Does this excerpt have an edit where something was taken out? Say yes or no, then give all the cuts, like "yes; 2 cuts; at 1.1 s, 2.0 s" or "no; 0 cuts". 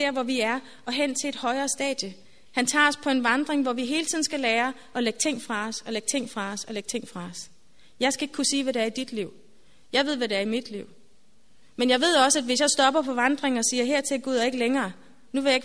no; 0 cuts